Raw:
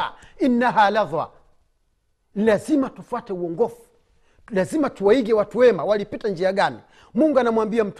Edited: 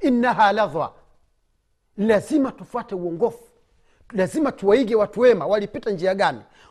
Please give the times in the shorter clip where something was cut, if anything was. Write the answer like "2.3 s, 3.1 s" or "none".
none

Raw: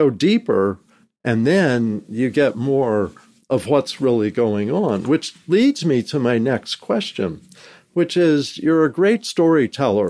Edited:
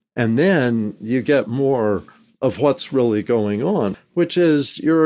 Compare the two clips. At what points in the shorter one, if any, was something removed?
3.9 s

